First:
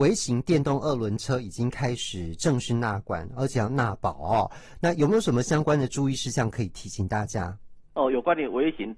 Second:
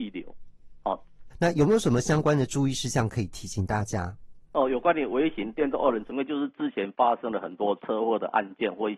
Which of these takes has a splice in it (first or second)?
second